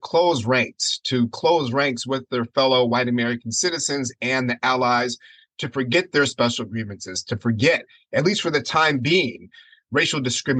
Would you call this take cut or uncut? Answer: uncut